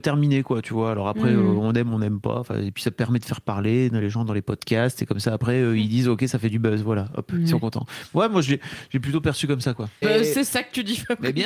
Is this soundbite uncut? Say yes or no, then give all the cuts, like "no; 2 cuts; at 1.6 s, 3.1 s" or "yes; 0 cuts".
no; 1 cut; at 10.0 s